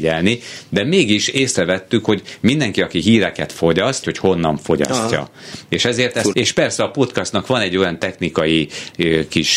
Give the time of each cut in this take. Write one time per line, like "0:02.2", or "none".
0:04.0
0:06.3